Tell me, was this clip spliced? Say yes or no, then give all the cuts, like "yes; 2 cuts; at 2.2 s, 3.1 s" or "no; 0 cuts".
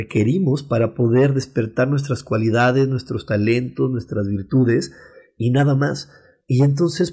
no; 0 cuts